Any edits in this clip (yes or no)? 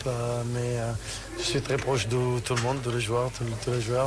no